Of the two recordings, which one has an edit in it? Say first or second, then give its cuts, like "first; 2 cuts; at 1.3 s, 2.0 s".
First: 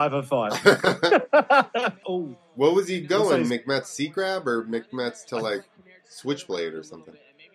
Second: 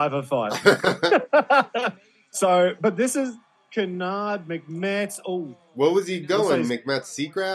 first; 1 cut; at 2.0 s